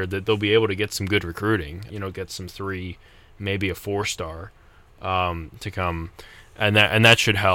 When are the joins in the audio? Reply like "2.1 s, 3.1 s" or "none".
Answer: 1.9 s